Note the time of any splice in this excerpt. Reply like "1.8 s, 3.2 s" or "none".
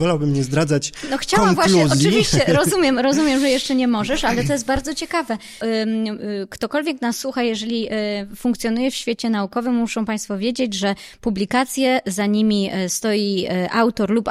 5.6 s